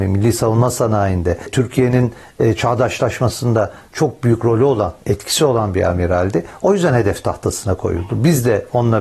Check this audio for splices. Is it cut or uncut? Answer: uncut